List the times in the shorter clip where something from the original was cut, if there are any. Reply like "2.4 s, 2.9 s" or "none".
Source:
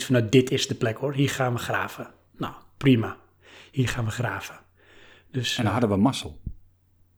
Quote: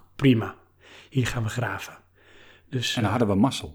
none